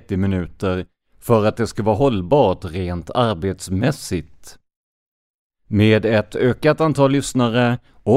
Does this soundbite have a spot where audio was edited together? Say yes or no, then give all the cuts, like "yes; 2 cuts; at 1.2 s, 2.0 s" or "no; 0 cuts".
no; 0 cuts